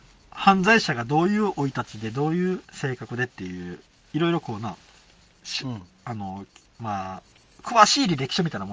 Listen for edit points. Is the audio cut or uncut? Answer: cut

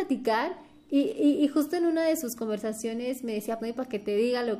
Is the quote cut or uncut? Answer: cut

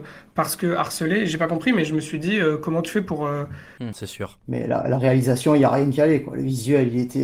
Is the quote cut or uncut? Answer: cut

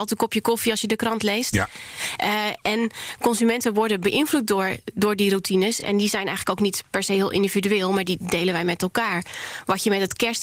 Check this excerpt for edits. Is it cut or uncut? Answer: uncut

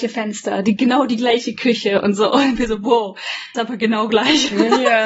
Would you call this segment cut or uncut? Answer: cut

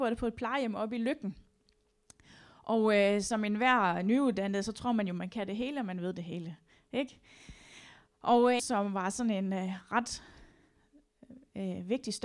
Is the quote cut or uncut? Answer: cut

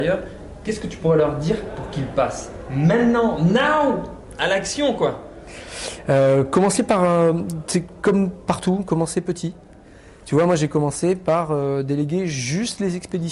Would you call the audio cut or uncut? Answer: uncut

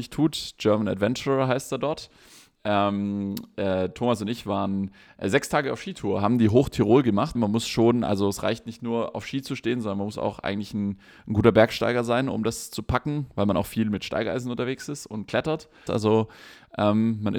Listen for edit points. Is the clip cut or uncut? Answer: cut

